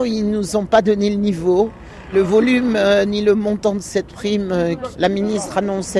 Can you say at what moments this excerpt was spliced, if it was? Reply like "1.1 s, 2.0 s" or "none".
2.1 s, 4.9 s